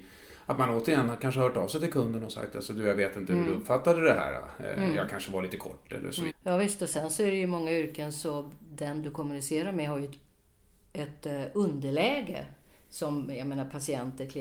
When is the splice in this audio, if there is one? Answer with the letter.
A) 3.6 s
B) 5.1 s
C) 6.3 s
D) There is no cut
C